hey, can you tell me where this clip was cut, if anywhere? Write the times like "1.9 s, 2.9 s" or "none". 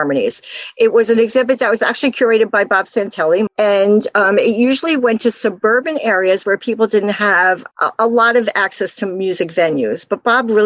3.5 s, 7.7 s